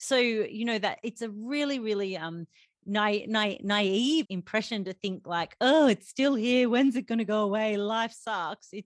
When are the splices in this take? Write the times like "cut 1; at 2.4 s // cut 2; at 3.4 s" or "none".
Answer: cut 1; at 4.2 s

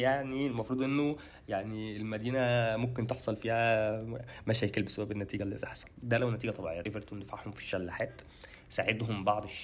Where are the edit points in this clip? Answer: cut 1; at 6.8 s

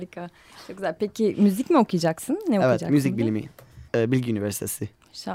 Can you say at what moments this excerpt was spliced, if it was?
cut 1; at 3.9 s

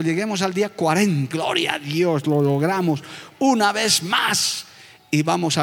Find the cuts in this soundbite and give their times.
cut 1; at 1.3 s

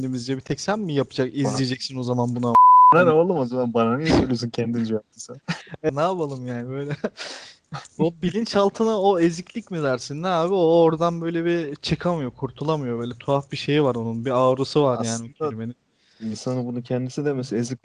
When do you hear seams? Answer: cut 1; at 5.9 s

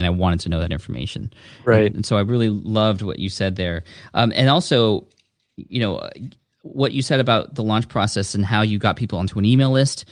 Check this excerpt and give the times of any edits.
none

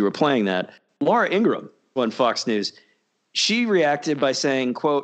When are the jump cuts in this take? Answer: cut 1; at 2.0 s

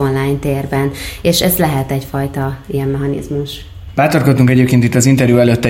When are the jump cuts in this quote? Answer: none

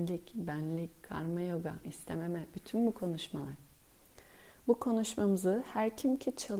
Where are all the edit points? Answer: cut 1; at 1.8 s

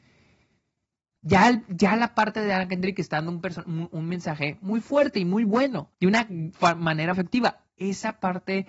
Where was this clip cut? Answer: cut 1; at 1.2 s // cut 2; at 5.9 s // cut 3; at 7.1 s

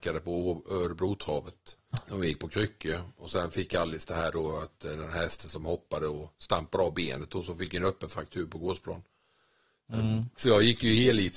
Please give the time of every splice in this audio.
cut 1; at 1.9 s // cut 2; at 10.3 s

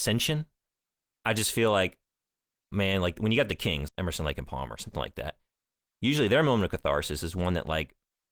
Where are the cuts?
cut 1; at 3.9 s

